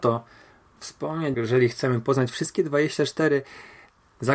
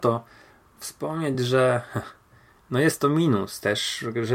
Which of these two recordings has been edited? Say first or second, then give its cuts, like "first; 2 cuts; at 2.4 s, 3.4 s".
first; 1 cut; at 1.3 s